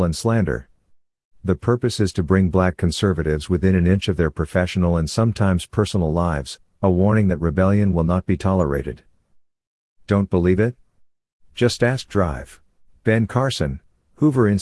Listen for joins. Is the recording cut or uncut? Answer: uncut